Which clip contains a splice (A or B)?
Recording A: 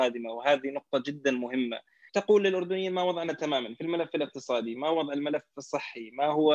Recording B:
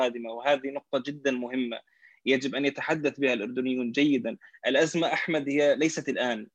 A